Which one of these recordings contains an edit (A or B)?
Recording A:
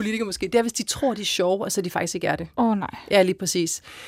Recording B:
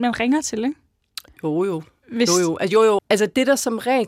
B